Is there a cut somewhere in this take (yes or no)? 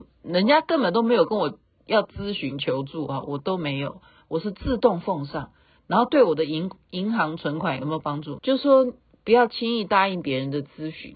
yes